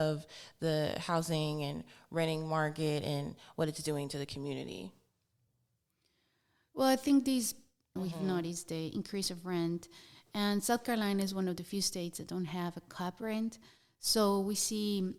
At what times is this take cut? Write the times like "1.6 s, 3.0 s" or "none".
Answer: 8.0 s